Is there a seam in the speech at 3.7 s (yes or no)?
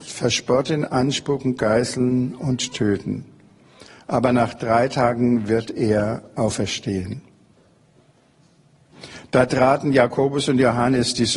no